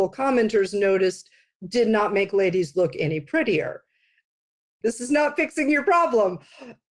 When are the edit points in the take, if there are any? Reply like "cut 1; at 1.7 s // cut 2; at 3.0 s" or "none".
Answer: cut 1; at 4.8 s